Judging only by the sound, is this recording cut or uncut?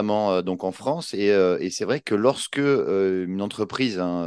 uncut